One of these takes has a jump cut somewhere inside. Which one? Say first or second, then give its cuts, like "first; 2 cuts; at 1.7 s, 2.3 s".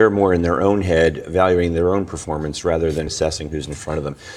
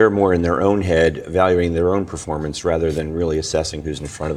first; 1 cut; at 3.1 s